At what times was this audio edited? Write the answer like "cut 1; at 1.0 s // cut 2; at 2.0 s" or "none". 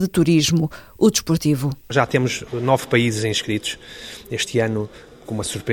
none